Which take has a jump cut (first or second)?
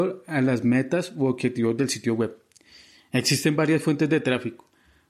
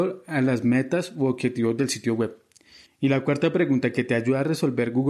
second